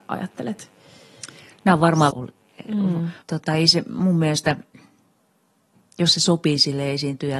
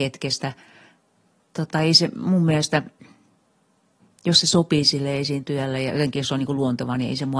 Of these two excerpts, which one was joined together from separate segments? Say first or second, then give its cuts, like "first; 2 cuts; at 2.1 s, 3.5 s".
first; 2 cuts; at 2.1 s, 3.2 s